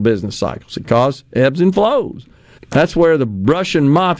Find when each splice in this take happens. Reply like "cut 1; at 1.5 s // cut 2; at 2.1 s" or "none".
cut 1; at 2.6 s